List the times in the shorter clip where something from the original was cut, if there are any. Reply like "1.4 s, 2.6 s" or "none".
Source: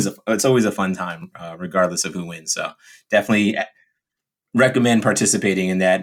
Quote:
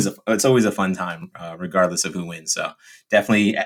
none